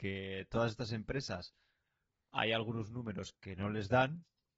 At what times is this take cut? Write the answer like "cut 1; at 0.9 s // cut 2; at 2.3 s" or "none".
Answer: none